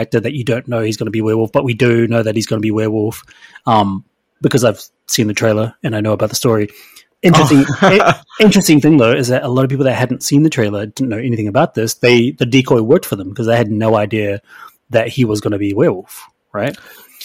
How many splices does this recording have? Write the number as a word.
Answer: zero